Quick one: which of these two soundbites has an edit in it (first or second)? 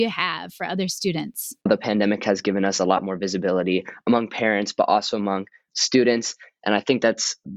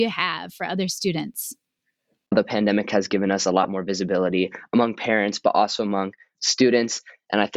first